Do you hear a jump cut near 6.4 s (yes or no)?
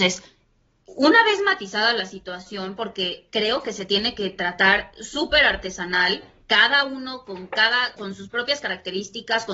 no